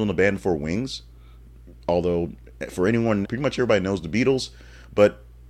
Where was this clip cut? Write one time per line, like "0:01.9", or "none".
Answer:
0:03.2